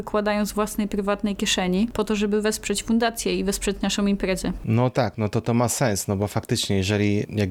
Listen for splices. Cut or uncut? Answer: uncut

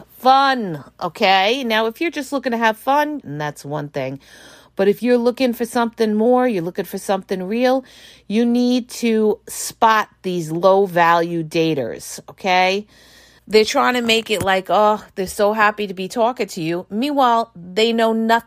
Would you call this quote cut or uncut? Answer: cut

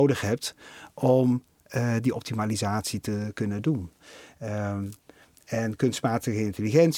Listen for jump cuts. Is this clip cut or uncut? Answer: uncut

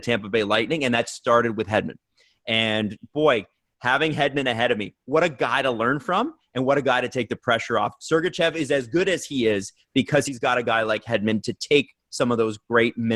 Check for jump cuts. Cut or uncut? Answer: cut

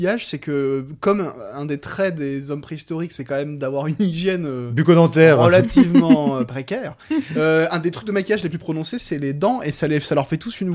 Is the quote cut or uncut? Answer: uncut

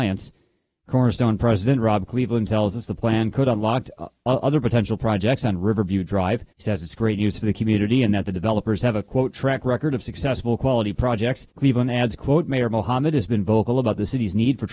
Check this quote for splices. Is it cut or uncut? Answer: cut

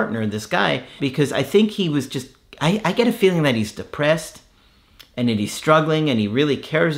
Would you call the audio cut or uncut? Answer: cut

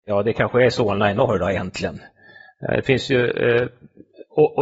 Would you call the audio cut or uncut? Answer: uncut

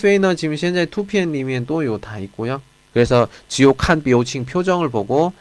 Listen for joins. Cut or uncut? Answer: cut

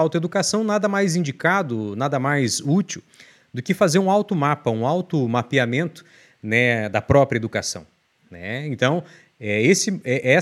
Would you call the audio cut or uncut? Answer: cut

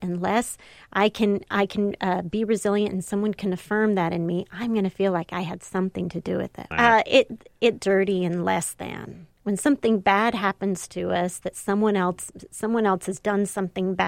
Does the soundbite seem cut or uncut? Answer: cut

